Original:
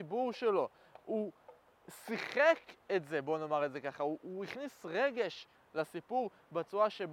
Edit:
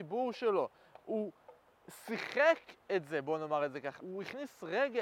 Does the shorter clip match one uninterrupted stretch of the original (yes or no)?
no